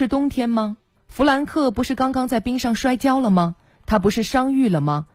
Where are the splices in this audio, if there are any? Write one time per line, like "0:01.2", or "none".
0:01.0